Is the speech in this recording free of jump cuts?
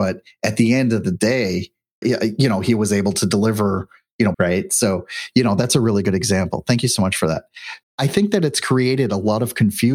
no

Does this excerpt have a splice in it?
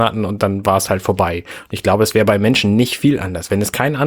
no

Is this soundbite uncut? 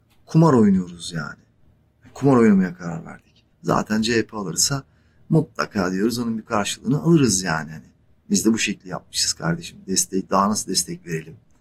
no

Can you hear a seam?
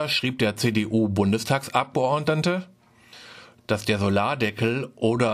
yes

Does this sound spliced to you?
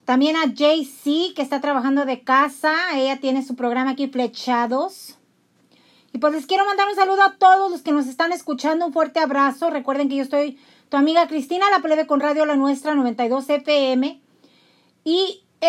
no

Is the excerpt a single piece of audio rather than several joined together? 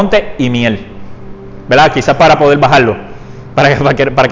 yes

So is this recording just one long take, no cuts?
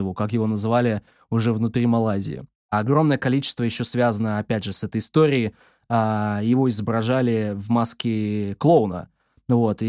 yes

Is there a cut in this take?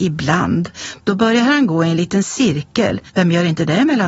yes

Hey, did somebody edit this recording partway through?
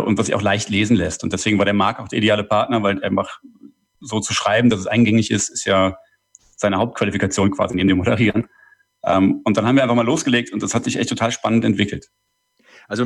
no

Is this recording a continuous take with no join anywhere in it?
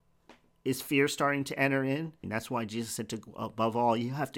no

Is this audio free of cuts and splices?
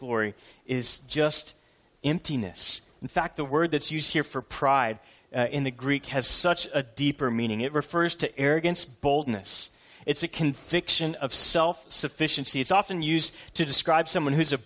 yes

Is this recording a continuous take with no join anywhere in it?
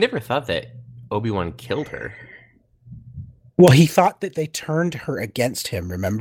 yes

